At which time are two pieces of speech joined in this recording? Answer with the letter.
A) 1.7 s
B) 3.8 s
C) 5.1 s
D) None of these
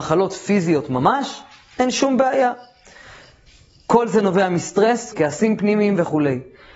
C